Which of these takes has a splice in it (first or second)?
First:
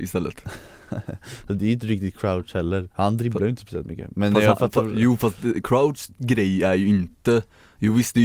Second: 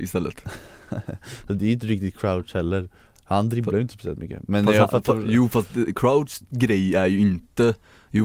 first